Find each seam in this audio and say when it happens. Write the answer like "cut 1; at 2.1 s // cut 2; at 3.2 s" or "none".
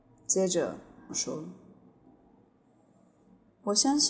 cut 1; at 1.1 s